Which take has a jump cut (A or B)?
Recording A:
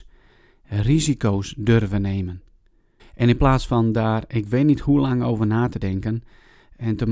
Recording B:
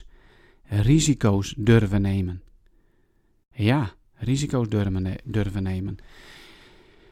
A